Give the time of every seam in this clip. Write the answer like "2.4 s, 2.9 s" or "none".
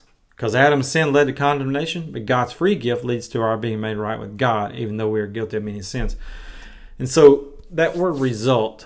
none